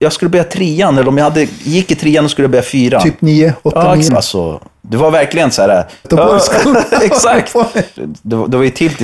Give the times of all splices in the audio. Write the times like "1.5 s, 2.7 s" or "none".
4.1 s, 6.0 s, 8.0 s